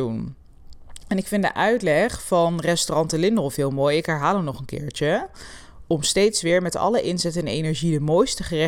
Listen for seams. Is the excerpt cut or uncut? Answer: uncut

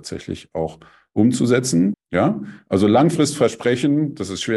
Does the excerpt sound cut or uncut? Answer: cut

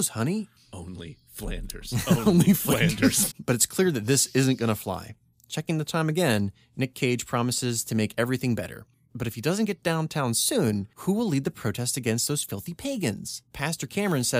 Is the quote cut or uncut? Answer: cut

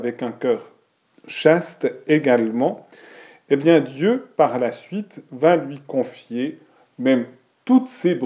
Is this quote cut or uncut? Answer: uncut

